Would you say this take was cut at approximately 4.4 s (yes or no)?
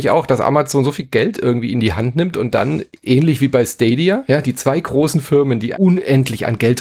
no